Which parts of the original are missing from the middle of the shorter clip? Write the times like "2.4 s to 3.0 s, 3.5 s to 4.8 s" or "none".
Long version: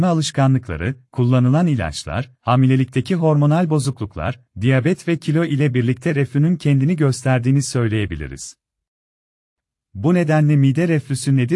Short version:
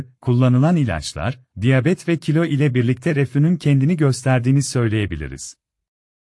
2.4 s to 4.5 s